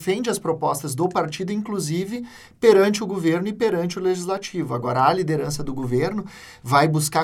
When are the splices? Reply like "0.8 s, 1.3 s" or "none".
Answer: none

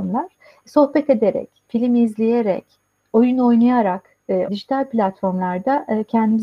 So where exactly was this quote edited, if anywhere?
1.7 s, 4.5 s

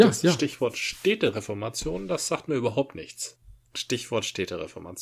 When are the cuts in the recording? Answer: none

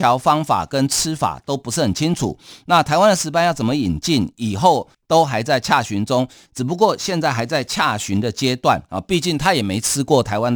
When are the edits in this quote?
5.0 s, 6.4 s

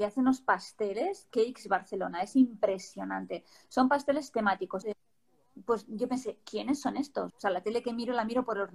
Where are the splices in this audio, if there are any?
4.8 s, 7.3 s

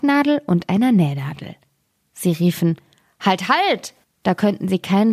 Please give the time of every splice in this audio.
4.0 s

